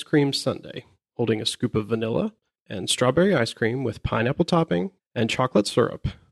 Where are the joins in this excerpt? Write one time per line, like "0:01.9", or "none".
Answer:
0:02.5
0:05.0